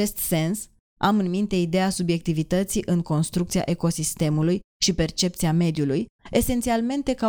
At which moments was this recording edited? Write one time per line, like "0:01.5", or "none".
0:06.2